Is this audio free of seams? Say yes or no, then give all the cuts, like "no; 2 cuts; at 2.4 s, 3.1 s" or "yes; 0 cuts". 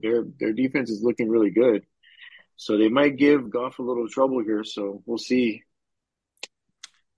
no; 1 cut; at 3.5 s